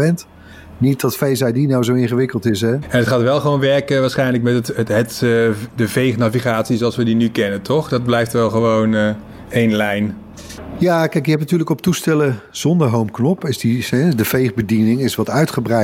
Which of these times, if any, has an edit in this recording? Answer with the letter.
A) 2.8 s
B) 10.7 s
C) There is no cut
A